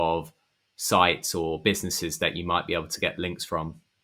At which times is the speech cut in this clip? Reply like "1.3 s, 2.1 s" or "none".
none

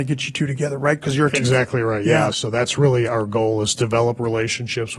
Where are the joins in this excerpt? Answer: 2.3 s

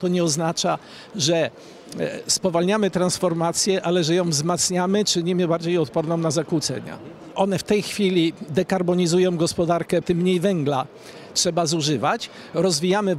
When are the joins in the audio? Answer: 7.3 s, 10.0 s

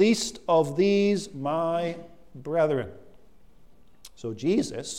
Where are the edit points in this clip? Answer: none

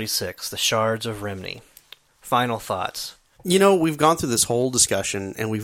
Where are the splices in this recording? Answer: 3.3 s

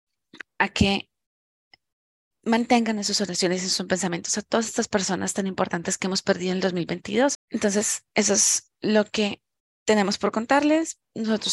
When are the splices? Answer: 7.3 s

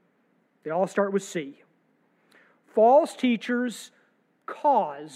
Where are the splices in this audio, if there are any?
none

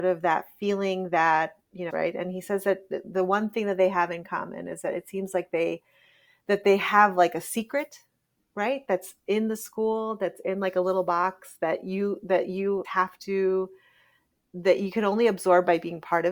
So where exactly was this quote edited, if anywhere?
1.9 s, 12.8 s

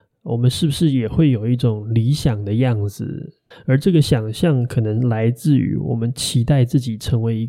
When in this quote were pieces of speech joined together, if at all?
3.5 s

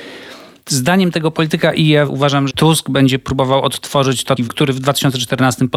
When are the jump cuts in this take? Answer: 2.5 s, 4.4 s

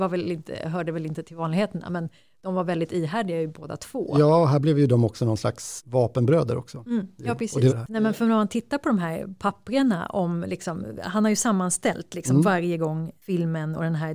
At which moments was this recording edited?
7.7 s

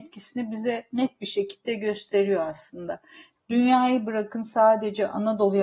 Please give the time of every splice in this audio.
3.4 s

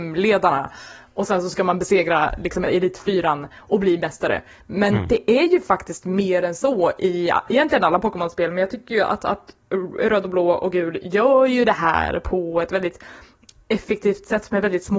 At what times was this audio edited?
2.7 s

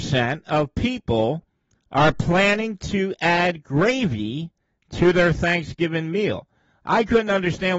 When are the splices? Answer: none

